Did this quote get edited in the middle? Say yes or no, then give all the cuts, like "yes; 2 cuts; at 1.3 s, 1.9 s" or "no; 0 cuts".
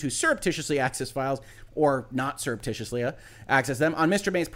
no; 0 cuts